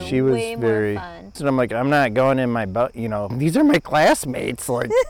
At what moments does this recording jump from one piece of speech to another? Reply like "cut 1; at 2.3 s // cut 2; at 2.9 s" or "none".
cut 1; at 1.4 s // cut 2; at 3.3 s